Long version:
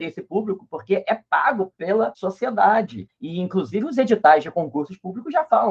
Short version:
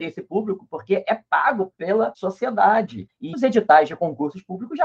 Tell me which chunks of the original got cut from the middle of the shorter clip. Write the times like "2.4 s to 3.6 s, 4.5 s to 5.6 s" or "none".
3.3 s to 3.9 s